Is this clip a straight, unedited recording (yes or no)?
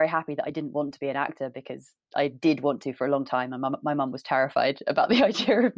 yes